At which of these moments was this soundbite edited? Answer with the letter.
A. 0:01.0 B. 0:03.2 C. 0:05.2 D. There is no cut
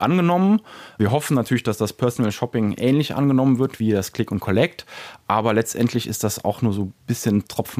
D